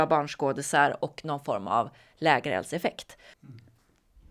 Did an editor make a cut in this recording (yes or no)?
yes